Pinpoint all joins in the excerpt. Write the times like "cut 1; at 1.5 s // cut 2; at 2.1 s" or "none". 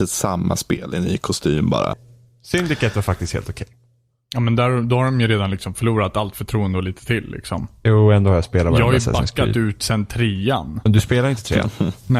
cut 1; at 1.9 s